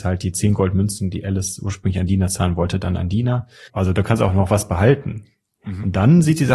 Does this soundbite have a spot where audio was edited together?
yes; 1 cut; at 3.7 s

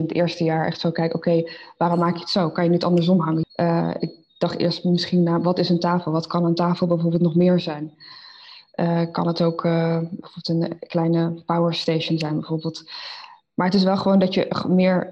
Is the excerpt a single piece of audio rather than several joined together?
no; 1 cut; at 3.4 s

